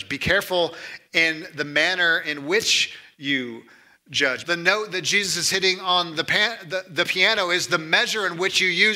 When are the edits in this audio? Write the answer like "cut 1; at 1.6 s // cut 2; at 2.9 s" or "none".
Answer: cut 1; at 4.4 s